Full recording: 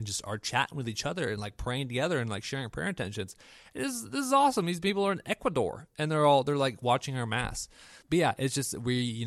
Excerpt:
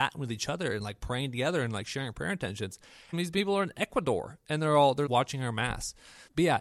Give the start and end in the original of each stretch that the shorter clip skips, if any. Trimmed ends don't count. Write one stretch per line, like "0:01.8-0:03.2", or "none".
0:03.7-0:04.6
0:06.5-0:06.8